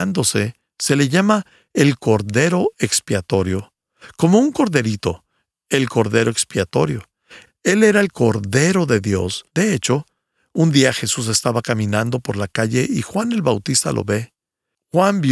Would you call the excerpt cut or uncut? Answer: cut